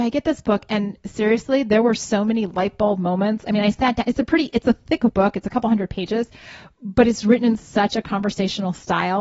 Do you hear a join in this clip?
no; 0 cuts

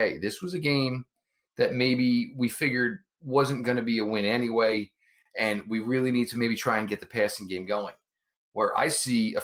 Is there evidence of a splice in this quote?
no; 0 cuts

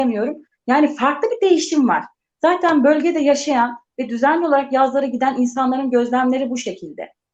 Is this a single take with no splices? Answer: yes; 0 cuts

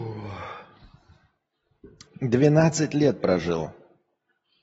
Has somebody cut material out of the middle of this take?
yes; 1 cut; at 2.1 s

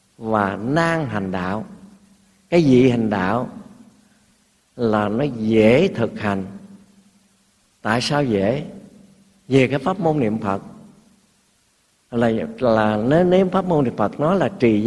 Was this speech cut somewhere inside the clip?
no; 0 cuts

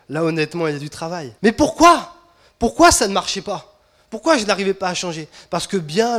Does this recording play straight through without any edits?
no; 1 cut; at 1.4 s

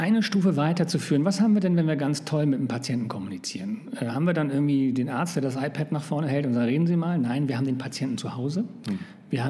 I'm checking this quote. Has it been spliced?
no; 0 cuts

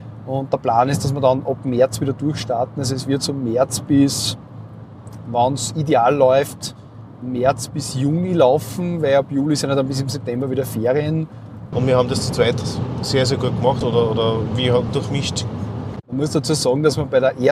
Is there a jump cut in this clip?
yes; 3 cuts; at 11.7 s, 13.8 s, 14.9 s

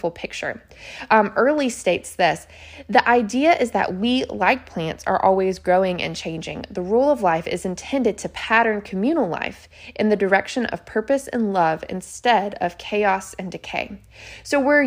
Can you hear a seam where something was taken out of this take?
no; 0 cuts

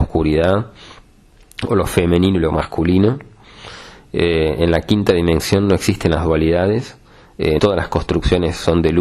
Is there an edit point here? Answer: yes; 1 cut; at 7.6 s

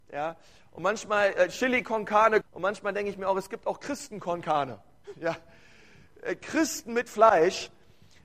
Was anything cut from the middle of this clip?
yes; 1 cut; at 2.4 s

